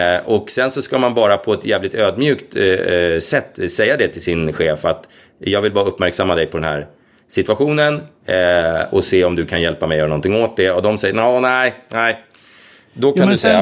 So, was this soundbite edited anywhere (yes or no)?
no